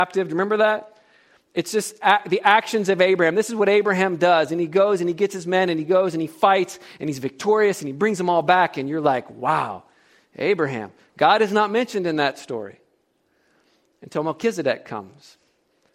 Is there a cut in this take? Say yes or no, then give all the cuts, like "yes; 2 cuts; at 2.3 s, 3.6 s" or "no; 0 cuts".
no; 0 cuts